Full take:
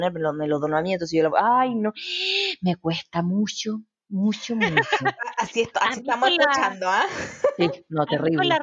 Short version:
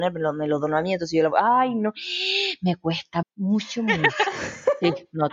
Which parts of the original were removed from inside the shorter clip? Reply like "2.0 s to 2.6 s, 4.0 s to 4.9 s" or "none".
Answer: 3.2 s to 3.9 s, 5.0 s to 7.0 s